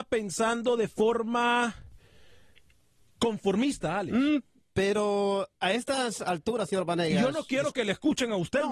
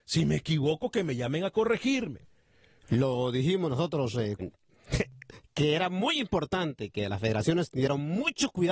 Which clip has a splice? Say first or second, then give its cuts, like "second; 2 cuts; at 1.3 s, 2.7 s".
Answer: second; 2 cuts; at 2.8 s, 4.4 s